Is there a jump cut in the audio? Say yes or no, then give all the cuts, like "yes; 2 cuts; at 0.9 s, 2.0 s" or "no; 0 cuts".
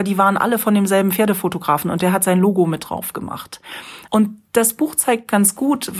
yes; 1 cut; at 4.1 s